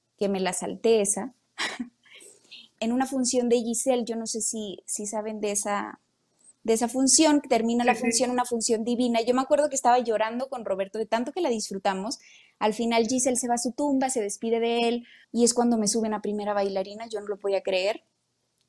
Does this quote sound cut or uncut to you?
cut